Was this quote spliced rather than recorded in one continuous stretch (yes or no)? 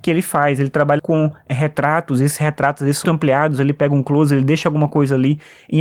yes